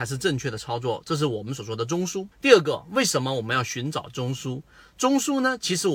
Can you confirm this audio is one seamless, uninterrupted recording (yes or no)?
no